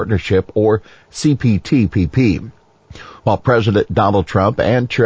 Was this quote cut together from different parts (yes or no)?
no